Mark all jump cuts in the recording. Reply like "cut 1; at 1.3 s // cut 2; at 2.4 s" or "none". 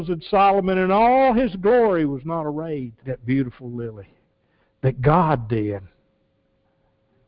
cut 1; at 3.0 s